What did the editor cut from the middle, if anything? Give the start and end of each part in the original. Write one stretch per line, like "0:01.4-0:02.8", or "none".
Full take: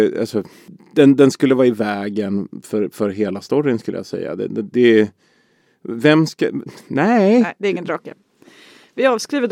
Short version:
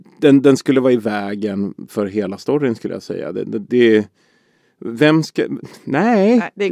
0:02.6-0:02.9

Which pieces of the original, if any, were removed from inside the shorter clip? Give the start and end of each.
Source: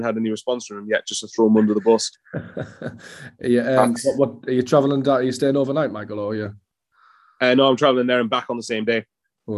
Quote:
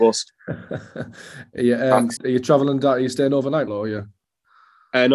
0:04.0-0:04.4
0:05.9-0:06.1

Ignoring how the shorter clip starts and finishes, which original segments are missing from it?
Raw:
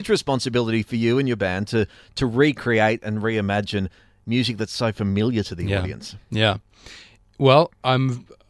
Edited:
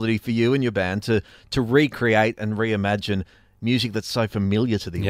none

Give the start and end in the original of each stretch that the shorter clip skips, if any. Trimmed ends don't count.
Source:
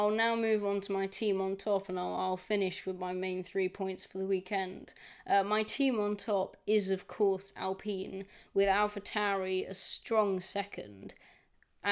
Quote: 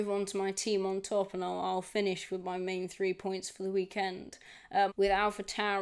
0:05.4-0:08.5

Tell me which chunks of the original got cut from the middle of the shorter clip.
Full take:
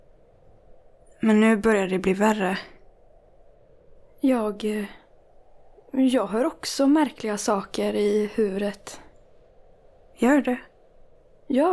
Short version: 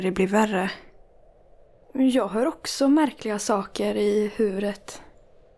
0:03.7-0:05.8

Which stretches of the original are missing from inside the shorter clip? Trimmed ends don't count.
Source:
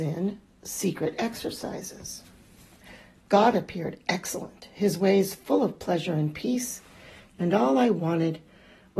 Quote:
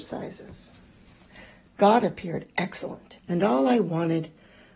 0:04.7-0:07.3

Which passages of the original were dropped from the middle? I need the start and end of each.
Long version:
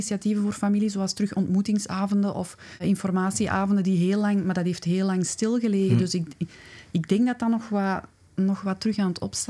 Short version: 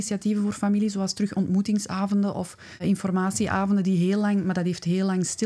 none

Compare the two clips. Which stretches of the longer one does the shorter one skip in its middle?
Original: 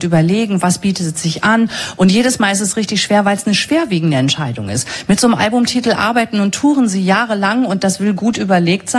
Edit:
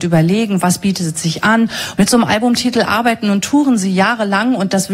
0:02.0-0:05.1

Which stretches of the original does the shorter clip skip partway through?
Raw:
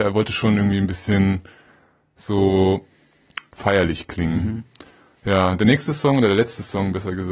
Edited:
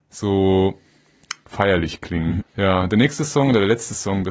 0:04.5-0:05.1

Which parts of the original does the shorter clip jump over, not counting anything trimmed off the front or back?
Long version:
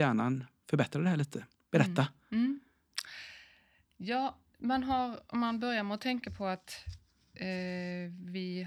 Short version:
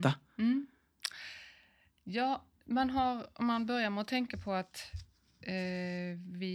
none

